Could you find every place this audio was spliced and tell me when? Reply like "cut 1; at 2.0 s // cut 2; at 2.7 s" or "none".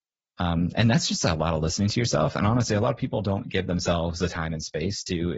none